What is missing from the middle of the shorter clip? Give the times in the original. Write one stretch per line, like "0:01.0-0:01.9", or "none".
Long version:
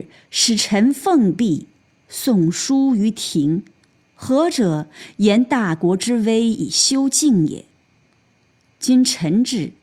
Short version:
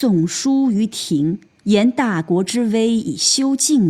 0:03.9-0:05.2